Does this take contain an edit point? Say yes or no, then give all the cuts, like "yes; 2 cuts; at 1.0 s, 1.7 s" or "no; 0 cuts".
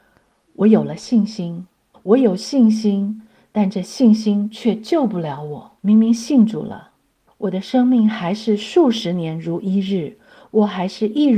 yes; 3 cuts; at 1.9 s, 5.8 s, 7.3 s